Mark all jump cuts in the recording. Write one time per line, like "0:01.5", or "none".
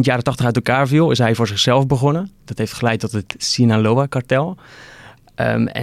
none